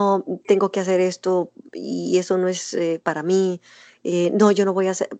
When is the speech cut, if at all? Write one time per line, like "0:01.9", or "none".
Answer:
none